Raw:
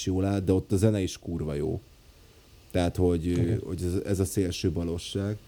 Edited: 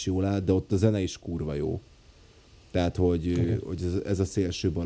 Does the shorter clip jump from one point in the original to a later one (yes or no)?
no